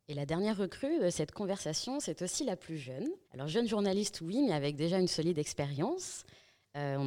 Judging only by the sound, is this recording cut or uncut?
cut